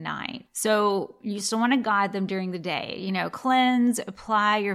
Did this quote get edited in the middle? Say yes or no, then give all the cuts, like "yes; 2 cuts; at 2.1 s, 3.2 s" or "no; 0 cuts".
no; 0 cuts